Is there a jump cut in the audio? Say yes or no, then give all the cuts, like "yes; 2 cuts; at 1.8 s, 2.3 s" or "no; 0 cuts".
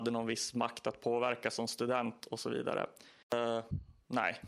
yes; 1 cut; at 3.2 s